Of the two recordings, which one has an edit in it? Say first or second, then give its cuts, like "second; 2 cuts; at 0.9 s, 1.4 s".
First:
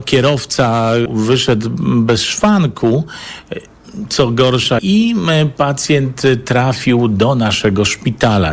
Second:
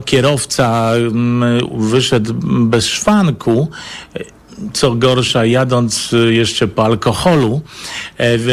first; 2 cuts; at 1.1 s, 4.8 s